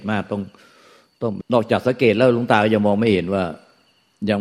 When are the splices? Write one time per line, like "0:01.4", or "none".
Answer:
0:01.4